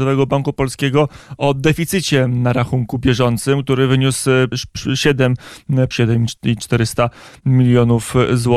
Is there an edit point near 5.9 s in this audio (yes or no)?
yes